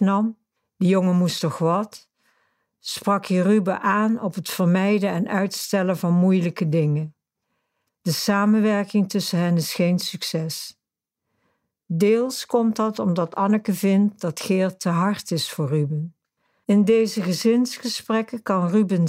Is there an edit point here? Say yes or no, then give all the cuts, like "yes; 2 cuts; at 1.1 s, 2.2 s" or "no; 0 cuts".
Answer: yes; 2 cuts; at 7.9 s, 16.6 s